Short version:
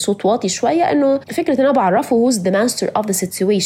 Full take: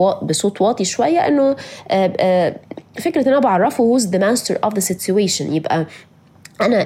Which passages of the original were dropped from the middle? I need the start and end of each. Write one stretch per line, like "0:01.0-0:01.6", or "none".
0:01.6-0:02.9